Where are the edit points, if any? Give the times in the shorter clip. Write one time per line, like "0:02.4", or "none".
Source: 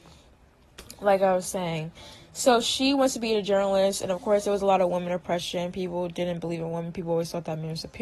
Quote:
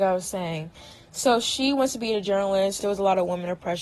0:02.8

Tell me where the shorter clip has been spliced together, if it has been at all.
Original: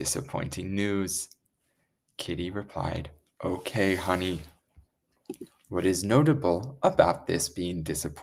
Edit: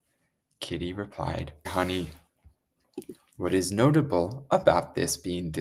0:01.6

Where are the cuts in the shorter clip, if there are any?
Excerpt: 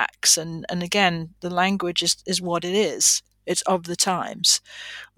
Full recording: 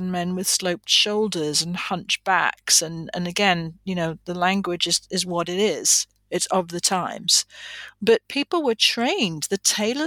0:01.4

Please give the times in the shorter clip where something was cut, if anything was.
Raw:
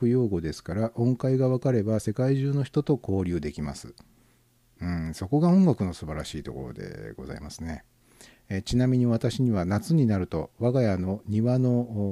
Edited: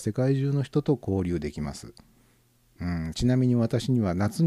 0:03.1

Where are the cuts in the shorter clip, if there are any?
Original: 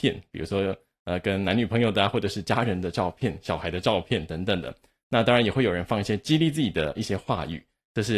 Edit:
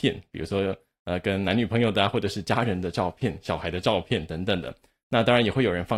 none

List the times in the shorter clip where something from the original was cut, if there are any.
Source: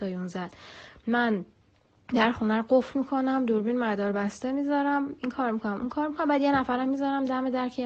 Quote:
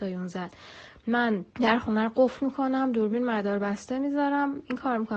0:01.5

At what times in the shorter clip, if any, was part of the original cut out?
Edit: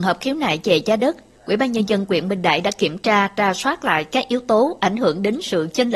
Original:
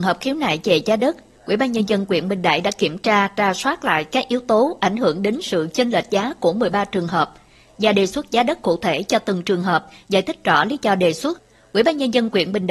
none

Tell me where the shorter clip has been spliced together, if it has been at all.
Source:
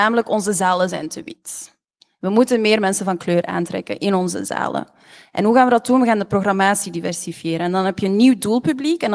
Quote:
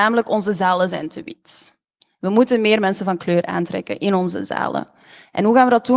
none

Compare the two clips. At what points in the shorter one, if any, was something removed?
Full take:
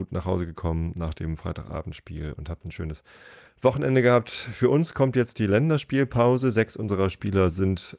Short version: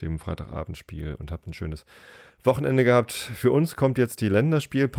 none

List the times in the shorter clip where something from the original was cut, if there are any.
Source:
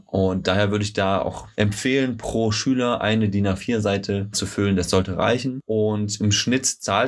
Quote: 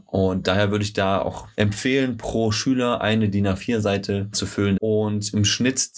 0:04.8

